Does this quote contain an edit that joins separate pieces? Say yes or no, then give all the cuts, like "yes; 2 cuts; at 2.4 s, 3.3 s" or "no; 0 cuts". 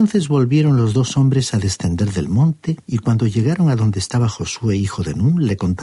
yes; 1 cut; at 2.9 s